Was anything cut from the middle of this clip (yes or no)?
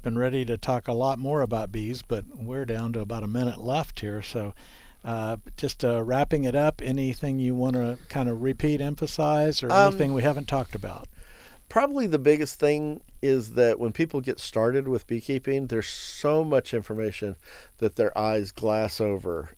no